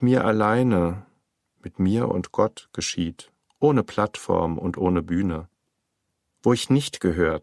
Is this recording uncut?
yes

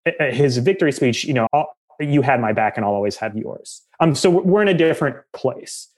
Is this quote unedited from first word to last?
no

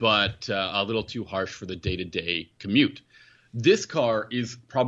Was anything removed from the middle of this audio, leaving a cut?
no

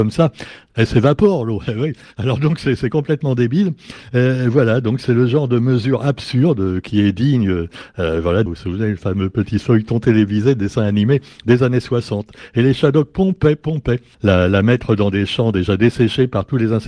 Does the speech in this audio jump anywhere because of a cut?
yes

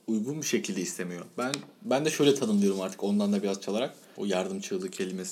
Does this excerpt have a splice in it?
yes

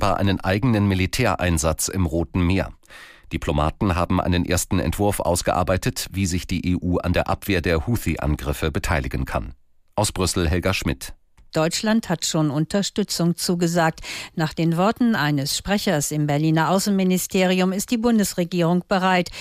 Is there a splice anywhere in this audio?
no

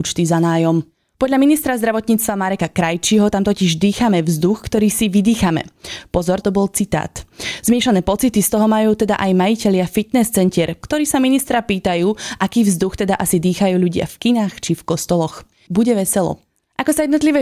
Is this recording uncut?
no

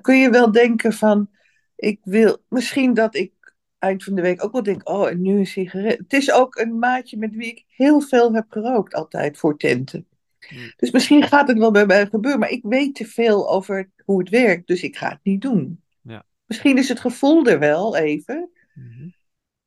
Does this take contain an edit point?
no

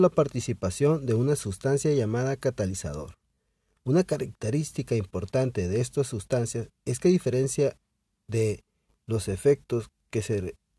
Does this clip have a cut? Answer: no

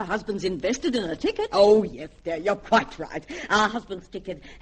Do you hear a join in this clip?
no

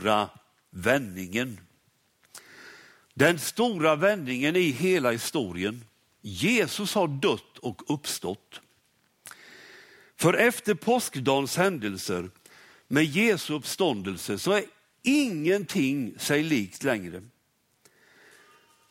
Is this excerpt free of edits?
yes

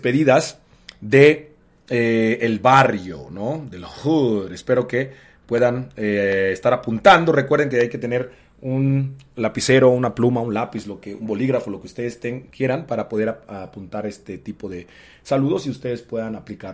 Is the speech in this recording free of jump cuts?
yes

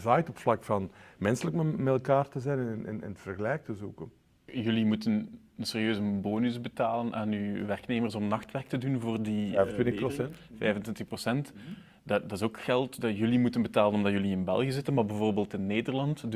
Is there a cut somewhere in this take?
no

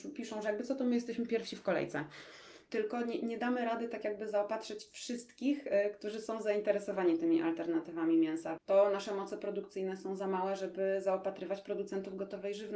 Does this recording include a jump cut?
yes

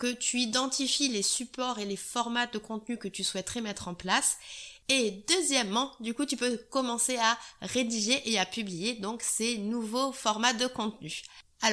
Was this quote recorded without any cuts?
yes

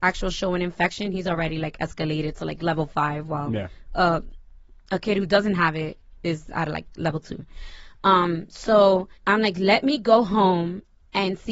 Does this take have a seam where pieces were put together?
yes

